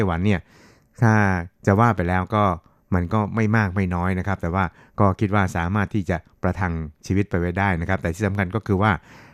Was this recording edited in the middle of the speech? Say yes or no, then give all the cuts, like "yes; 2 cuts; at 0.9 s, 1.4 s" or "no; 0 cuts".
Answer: no; 0 cuts